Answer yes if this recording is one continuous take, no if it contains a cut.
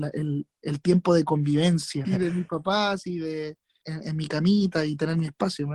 no